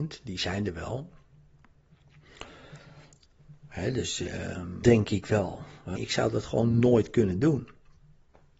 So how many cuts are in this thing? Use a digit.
2